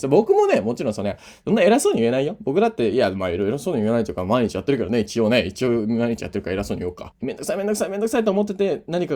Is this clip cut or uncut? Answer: cut